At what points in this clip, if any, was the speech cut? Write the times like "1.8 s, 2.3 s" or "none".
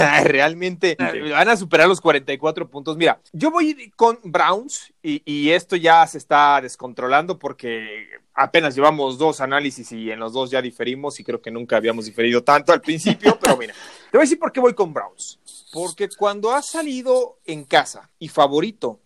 1.0 s